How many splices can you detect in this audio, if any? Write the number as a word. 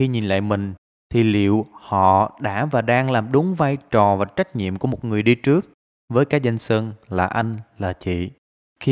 zero